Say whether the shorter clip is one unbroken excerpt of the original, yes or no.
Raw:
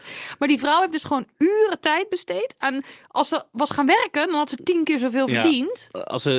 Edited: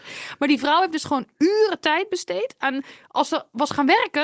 yes